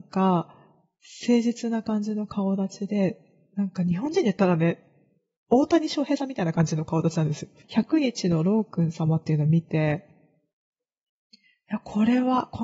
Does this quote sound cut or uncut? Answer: cut